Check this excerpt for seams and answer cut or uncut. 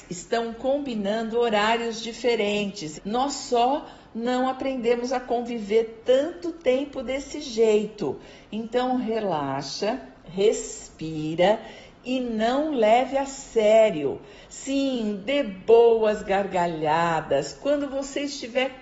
cut